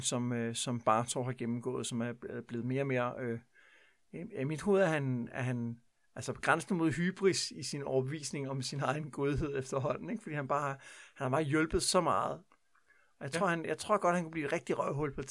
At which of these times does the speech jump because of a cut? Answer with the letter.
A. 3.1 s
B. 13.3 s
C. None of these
C